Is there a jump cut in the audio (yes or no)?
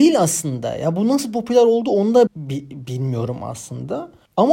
yes